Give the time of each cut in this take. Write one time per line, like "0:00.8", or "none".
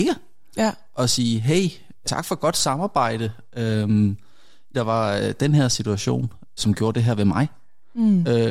0:02.0
0:04.7
0:06.6